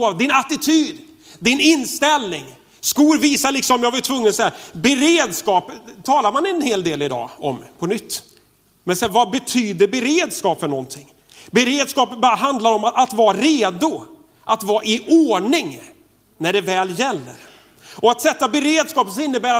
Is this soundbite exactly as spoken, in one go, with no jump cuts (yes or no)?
no